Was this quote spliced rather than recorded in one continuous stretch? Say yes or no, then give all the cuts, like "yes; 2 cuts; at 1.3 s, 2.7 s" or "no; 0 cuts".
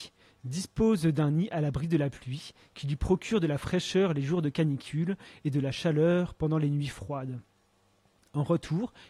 no; 0 cuts